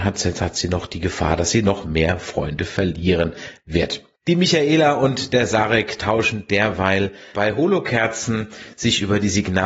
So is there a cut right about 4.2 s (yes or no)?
yes